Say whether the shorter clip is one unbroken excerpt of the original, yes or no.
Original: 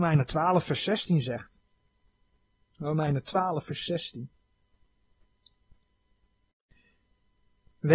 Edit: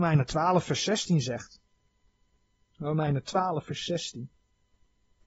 yes